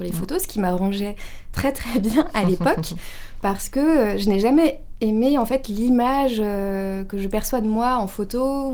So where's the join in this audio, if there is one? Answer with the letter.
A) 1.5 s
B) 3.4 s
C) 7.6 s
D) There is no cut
D